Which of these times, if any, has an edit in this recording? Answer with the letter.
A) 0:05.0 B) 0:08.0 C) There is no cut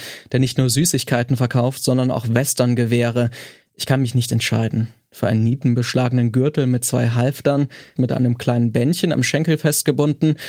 B